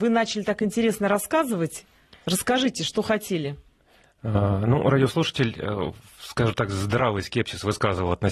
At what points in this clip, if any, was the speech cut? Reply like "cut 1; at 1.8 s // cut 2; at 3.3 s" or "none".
none